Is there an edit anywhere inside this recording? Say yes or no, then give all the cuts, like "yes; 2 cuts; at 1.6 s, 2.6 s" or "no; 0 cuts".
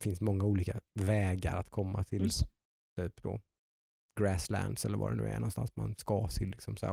no; 0 cuts